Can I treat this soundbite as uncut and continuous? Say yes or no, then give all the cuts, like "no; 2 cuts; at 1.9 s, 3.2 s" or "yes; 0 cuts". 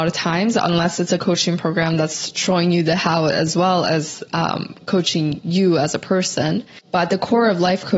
yes; 0 cuts